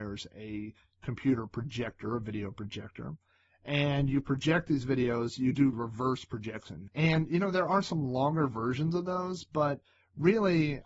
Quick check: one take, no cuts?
no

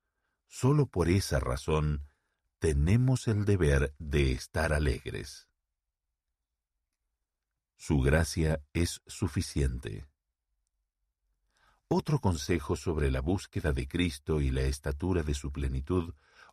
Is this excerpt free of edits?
yes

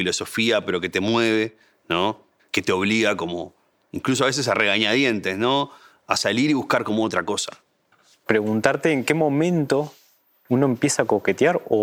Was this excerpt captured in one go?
yes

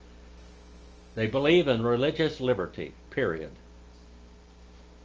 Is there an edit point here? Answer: yes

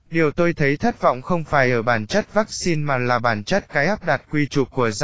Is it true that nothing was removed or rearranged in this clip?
yes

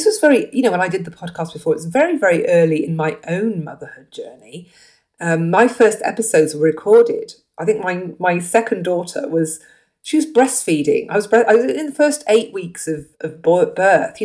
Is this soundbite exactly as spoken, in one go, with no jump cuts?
no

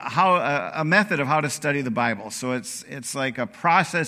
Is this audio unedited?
yes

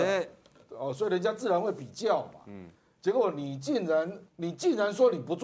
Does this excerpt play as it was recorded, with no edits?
no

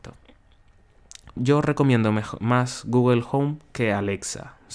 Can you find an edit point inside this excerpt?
yes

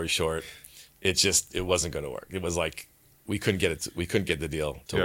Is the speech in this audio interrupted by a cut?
no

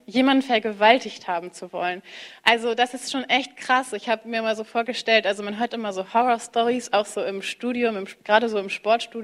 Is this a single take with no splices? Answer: yes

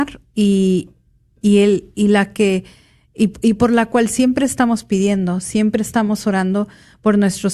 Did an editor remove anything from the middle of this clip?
no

